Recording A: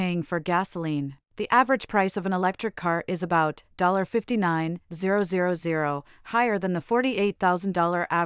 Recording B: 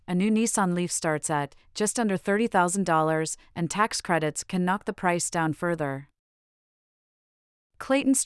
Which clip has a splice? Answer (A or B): A